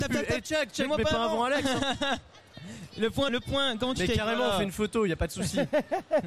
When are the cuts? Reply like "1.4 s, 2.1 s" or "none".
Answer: 3.3 s